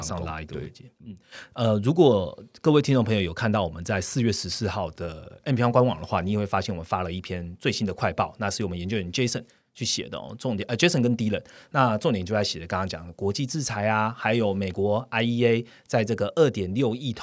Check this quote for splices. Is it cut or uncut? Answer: uncut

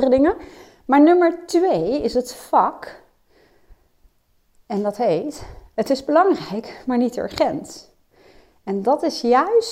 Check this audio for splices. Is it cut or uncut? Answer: uncut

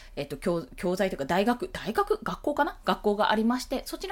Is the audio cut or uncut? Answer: uncut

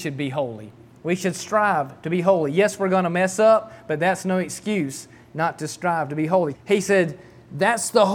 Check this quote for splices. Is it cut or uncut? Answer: cut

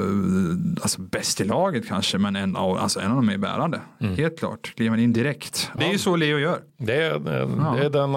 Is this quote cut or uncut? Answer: cut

